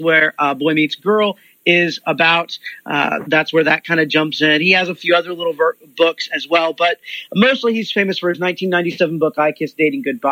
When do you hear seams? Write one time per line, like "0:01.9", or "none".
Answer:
none